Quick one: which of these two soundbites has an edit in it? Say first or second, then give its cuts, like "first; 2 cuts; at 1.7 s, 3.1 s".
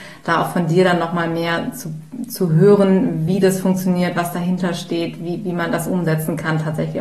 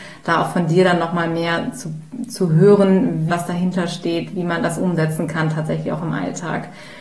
second; 2 cuts; at 3.3 s, 4.3 s